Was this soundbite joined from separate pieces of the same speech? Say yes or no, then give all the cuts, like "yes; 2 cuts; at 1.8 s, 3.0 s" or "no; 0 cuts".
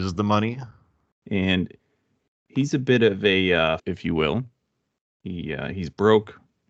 yes; 2 cuts; at 1.1 s, 3.8 s